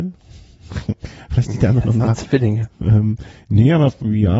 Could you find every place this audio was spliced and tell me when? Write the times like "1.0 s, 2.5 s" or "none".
none